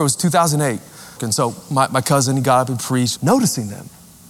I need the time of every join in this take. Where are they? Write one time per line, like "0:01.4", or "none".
0:01.2
0:03.1